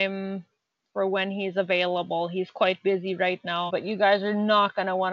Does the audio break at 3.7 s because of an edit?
yes; 1 cut; at 3.7 s

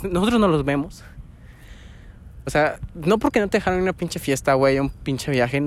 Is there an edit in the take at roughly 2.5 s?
yes; 1 cut; at 2.5 s

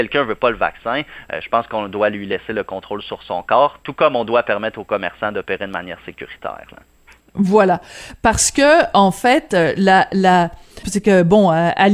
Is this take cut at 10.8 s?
yes; 1 cut; at 10.8 s

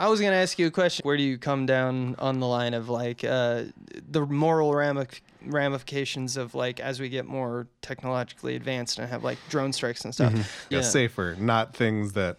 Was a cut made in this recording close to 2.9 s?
no; 2 cuts; at 1.0 s, 10.7 s

